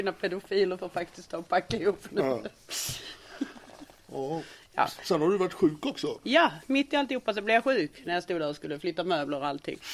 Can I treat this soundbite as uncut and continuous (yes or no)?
yes